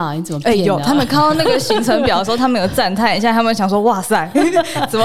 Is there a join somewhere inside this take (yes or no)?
no